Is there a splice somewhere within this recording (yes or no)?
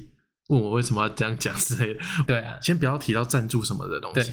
yes